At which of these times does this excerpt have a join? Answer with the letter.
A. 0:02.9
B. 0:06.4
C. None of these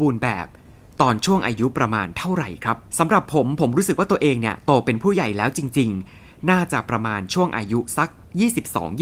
A